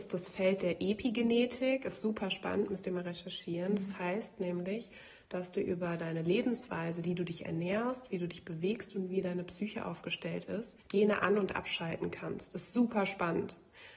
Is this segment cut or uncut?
cut